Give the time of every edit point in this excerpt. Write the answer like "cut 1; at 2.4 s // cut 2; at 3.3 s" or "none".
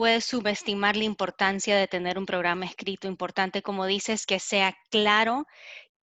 none